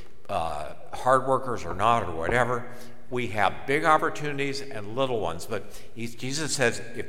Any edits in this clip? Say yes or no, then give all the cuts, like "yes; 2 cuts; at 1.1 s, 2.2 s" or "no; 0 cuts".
yes; 1 cut; at 3.1 s